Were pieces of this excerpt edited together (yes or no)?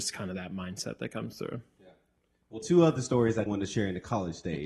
yes